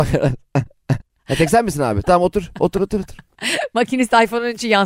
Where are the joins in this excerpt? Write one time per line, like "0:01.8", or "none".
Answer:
0:01.0
0:02.7